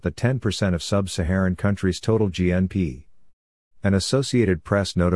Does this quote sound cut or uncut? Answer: uncut